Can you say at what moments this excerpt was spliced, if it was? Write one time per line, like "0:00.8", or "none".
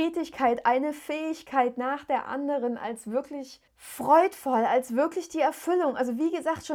0:03.7